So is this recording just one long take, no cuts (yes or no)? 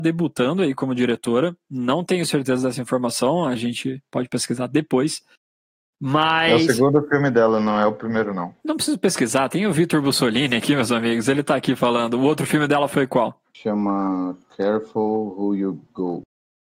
no